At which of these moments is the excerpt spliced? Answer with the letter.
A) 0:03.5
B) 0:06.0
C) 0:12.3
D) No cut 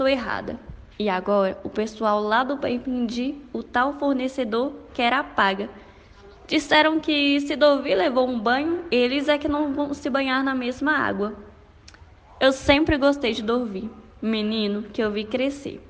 D